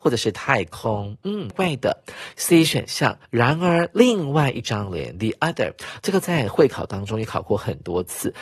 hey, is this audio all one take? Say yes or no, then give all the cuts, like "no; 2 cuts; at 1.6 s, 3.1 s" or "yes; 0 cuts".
no; 2 cuts; at 1.5 s, 3.2 s